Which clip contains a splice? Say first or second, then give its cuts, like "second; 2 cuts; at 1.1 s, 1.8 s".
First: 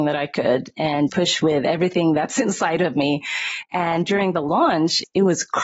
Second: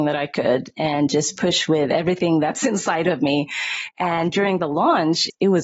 first; 1 cut; at 1.1 s